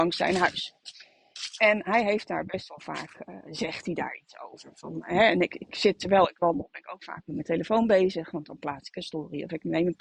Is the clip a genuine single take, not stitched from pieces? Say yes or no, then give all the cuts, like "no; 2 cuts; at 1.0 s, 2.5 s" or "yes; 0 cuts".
yes; 0 cuts